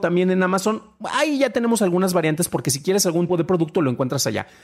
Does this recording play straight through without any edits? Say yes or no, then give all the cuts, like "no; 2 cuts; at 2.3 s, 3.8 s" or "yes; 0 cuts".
no; 1 cut; at 3.3 s